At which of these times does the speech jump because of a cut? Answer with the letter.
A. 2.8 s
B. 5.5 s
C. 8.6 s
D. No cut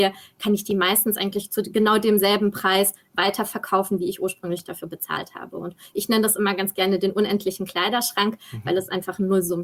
D